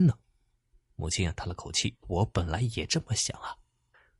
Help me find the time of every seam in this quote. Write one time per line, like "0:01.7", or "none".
0:02.0